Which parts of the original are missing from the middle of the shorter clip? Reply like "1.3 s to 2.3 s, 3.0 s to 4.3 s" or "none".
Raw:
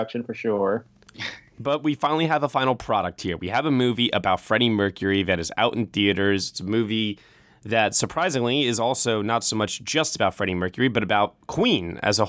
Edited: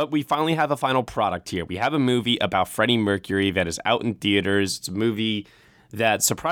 none